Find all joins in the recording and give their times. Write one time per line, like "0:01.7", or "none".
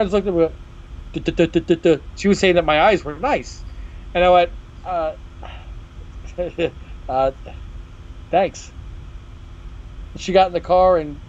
0:02.1